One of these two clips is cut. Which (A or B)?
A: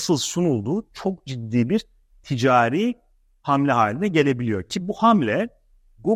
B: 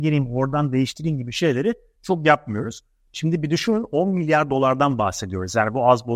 B